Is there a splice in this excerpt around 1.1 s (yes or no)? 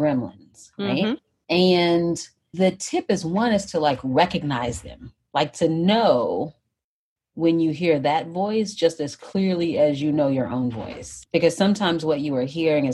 no